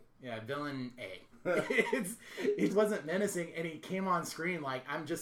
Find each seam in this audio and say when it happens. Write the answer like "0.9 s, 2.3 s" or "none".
1.3 s, 2.7 s